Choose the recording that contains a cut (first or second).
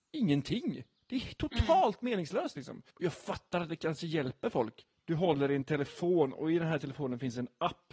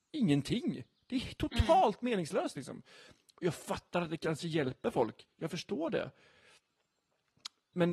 first